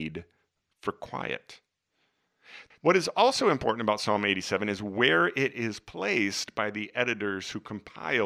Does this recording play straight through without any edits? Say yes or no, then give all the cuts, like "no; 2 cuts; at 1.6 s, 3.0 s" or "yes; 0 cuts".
no; 1 cut; at 2.7 s